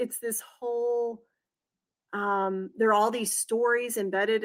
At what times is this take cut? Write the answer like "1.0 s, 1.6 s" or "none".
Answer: none